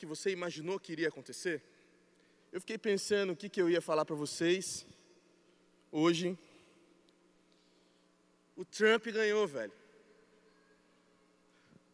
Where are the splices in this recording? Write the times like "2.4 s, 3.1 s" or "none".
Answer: 2.4 s, 8.5 s